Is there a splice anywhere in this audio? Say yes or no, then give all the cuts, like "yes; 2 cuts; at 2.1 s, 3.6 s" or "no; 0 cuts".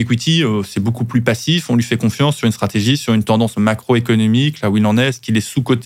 no; 0 cuts